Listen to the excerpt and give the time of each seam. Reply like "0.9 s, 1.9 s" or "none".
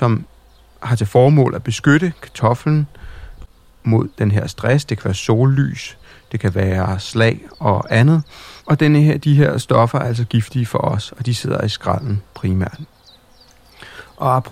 8.6 s